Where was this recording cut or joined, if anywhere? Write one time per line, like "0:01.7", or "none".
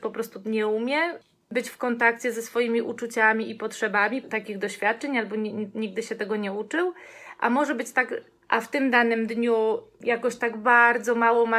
0:04.2
0:08.4